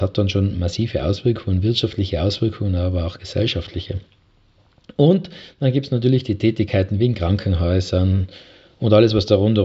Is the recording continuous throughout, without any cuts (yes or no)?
yes